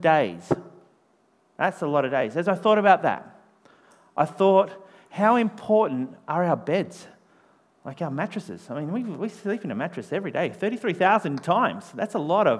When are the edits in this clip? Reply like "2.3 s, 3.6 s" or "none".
none